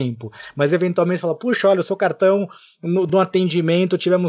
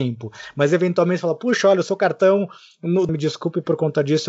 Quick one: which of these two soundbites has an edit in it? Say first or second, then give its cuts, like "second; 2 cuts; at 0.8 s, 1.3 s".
second; 1 cut; at 3.1 s